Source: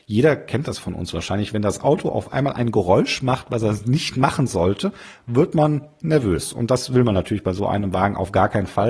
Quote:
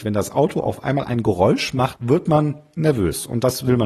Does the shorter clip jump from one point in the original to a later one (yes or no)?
yes